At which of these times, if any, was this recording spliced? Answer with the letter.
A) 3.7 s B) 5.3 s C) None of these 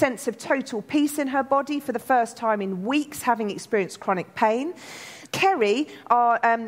B